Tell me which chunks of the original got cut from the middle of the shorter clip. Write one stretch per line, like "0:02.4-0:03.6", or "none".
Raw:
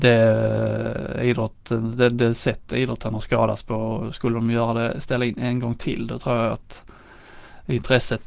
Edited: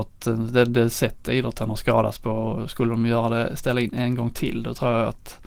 none